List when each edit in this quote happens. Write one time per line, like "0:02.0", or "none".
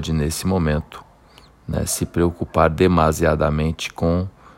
none

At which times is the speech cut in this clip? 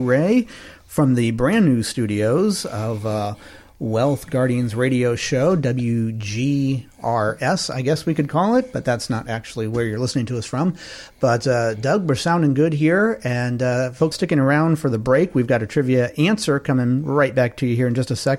0:14.1

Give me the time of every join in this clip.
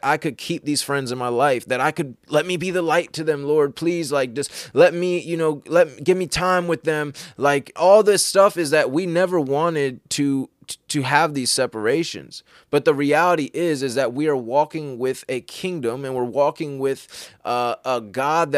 0:07.8

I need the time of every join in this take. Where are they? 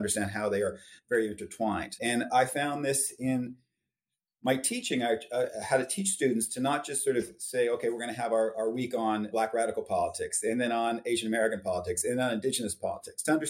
0:02.0

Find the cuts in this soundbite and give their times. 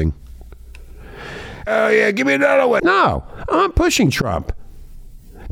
0:01.7
0:02.8

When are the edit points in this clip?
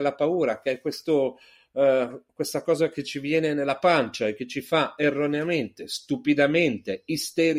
none

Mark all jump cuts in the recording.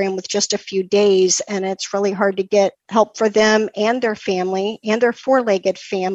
0:02.8

